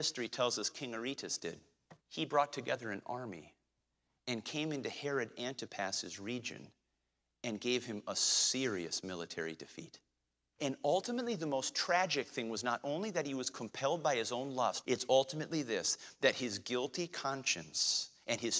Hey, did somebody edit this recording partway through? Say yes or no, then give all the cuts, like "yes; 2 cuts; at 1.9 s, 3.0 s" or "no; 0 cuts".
yes; 3 cuts; at 2.0 s, 10.6 s, 14.8 s